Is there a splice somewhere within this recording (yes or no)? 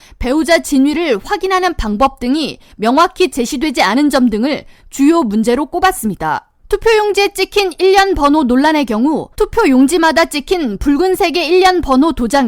yes